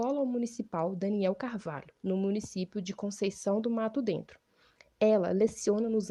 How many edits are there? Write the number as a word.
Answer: one